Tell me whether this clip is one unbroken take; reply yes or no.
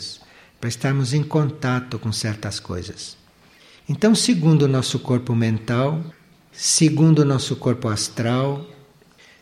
yes